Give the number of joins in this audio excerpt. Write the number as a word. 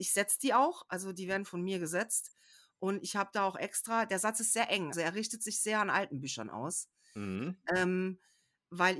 one